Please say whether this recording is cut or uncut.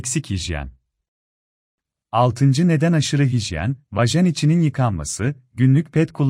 uncut